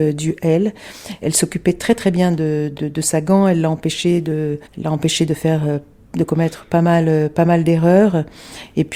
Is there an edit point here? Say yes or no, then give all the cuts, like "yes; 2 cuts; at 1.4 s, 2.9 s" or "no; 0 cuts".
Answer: yes; 3 cuts; at 1.2 s, 2.8 s, 4.7 s